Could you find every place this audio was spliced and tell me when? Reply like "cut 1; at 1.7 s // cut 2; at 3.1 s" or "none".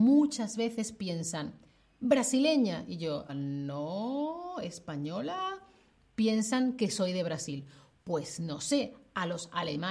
cut 1; at 3.3 s